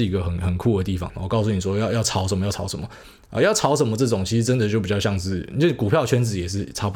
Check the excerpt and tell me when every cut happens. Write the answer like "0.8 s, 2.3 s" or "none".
1.1 s